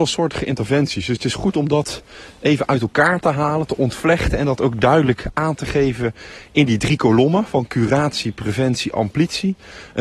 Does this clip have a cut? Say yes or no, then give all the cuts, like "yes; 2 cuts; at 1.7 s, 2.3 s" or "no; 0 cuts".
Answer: no; 0 cuts